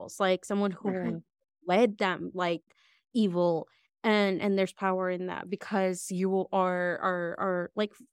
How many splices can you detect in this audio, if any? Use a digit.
0